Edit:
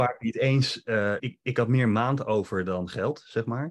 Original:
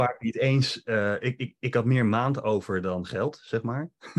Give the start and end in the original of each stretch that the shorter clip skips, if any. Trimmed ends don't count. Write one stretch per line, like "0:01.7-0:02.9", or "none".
0:01.2-0:01.4